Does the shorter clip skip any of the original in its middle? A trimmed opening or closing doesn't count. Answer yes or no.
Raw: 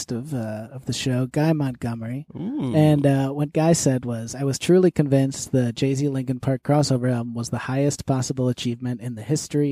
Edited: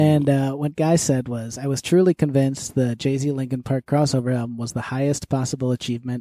no